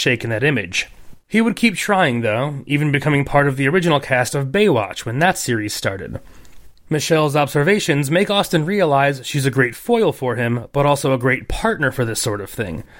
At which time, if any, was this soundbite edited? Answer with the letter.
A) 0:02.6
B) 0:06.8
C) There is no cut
B